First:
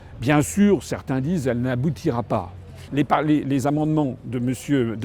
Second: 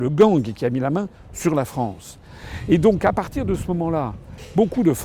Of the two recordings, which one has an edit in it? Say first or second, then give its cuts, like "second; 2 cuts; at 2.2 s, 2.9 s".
first; 1 cut; at 2.9 s